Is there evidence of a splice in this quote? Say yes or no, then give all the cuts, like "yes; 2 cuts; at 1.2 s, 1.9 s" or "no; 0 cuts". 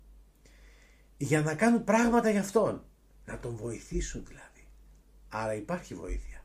no; 0 cuts